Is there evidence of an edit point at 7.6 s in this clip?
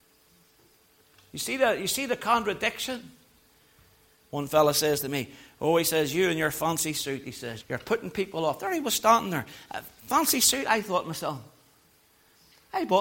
yes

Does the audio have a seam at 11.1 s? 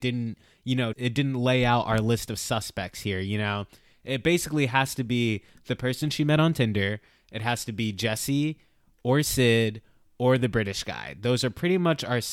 no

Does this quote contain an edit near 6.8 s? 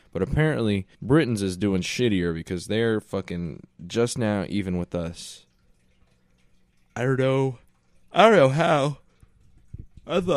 no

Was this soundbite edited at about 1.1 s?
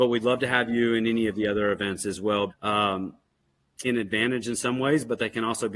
no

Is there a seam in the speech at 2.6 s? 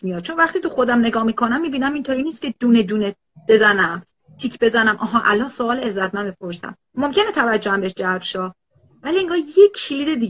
no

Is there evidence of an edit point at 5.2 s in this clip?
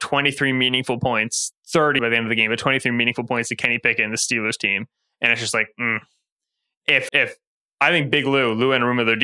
no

